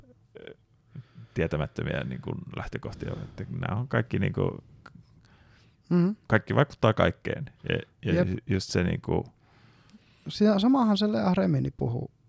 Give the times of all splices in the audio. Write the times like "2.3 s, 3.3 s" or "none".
6.2 s